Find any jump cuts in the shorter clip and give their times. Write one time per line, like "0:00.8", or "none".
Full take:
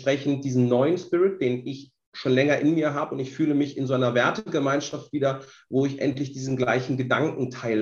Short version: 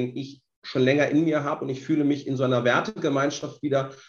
none